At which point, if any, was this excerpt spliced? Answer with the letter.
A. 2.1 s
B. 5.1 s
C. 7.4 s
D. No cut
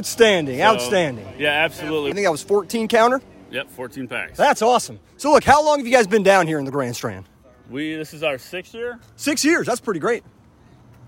A